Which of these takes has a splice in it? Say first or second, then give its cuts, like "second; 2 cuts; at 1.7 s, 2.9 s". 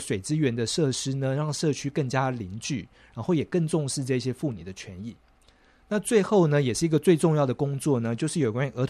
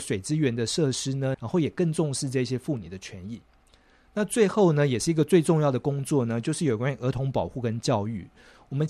second; 1 cut; at 1.3 s